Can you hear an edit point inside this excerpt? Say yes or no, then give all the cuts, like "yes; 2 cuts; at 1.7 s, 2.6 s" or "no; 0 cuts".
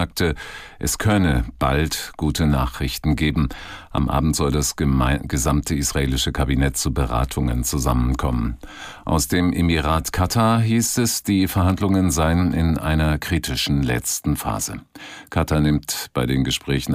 no; 0 cuts